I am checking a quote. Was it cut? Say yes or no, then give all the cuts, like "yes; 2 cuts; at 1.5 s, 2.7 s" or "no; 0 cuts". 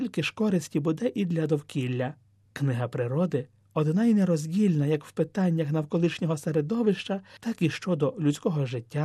no; 0 cuts